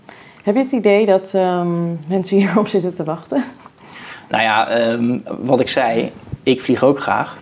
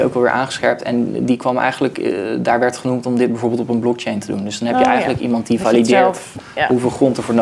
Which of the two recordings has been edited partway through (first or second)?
first